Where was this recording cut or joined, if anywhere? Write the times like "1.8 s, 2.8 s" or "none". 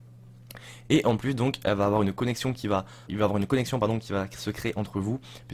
3.1 s